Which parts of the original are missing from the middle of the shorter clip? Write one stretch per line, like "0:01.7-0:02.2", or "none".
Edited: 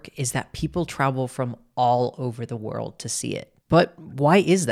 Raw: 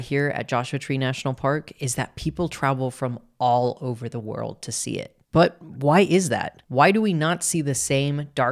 none